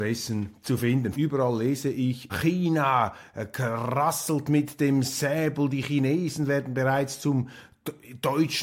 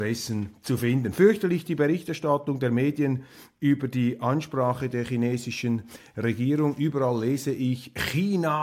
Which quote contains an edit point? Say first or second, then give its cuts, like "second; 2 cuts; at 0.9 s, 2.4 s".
first; 2 cuts; at 1.1 s, 2.3 s